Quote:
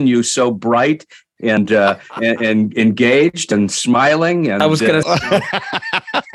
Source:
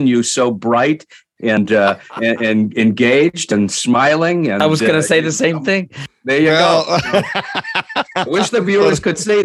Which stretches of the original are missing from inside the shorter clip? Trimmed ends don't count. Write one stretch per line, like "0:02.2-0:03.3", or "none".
0:05.0-0:06.8